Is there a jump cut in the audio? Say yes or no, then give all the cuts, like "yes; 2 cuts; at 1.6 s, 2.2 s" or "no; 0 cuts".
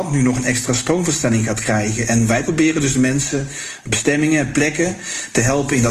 no; 0 cuts